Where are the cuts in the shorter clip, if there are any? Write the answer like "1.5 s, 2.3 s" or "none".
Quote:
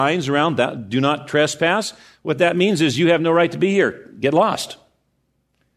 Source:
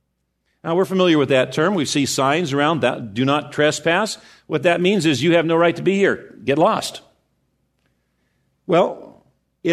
none